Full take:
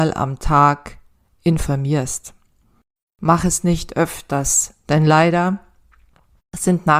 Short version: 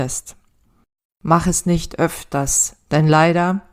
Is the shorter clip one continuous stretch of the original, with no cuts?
yes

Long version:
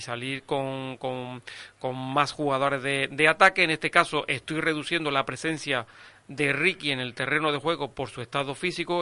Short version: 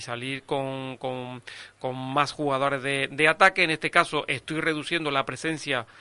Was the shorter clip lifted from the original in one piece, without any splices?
yes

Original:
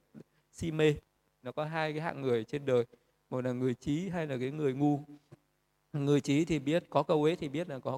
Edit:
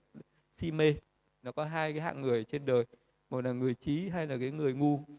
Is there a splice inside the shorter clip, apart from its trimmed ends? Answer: no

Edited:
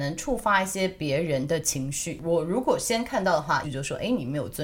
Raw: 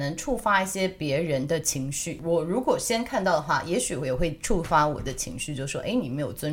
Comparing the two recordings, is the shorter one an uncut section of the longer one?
no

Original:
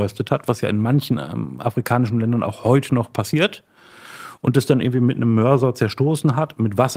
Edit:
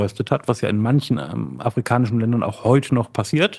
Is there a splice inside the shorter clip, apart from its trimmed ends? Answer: no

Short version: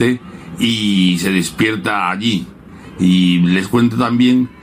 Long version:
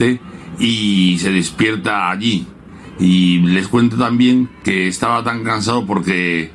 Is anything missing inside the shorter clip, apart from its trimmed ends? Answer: no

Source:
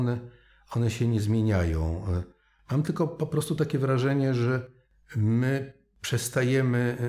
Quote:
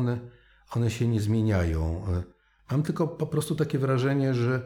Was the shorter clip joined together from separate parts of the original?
no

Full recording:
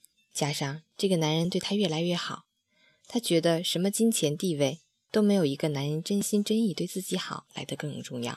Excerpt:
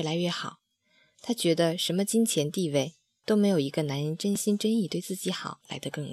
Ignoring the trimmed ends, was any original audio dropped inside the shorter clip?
no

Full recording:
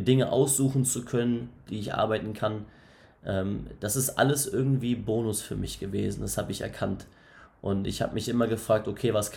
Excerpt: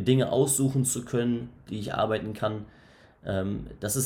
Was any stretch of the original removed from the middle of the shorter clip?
no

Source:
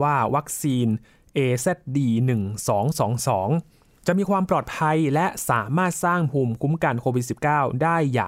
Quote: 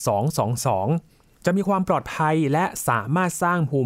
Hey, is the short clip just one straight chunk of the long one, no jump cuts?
yes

